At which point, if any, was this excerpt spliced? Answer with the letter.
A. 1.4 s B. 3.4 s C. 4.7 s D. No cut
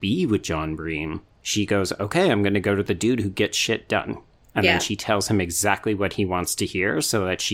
A